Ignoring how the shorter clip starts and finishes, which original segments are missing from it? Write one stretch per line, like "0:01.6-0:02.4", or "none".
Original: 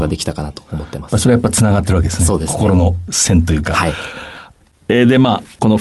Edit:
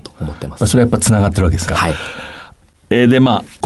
0:02.2-0:03.7